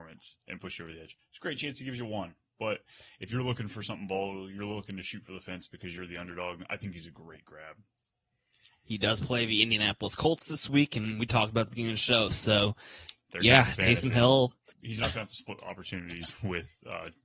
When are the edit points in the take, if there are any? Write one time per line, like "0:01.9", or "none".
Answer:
0:12.3
0:14.7